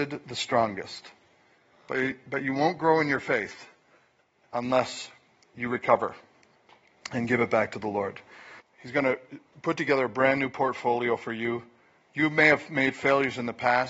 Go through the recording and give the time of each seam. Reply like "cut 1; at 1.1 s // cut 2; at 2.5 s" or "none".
cut 1; at 8.6 s